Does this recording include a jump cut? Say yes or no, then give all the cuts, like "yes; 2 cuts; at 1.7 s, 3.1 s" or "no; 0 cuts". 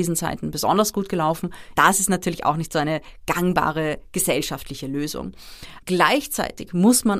yes; 2 cuts; at 1.7 s, 5.8 s